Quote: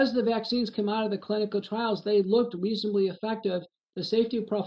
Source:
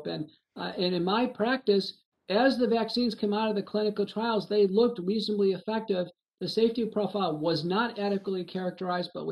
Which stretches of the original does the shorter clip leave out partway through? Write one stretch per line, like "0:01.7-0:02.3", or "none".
none